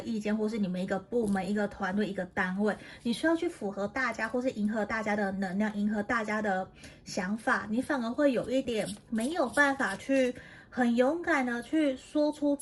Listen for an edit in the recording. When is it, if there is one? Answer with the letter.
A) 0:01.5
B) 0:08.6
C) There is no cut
B